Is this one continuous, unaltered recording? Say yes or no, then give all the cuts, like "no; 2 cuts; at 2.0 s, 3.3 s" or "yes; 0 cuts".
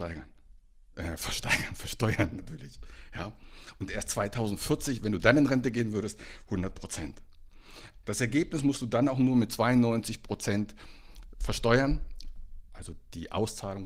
no; 1 cut; at 8.0 s